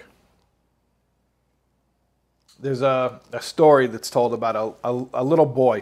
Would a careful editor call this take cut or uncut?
uncut